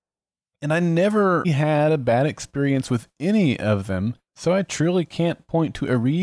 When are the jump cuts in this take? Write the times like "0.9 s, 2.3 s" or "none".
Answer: 1.4 s, 4.3 s